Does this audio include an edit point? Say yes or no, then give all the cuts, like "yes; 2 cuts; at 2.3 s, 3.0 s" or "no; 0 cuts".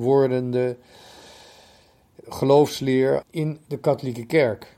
yes; 1 cut; at 3.2 s